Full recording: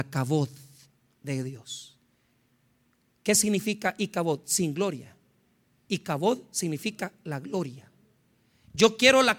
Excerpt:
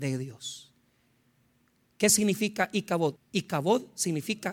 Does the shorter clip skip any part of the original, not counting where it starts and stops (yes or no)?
yes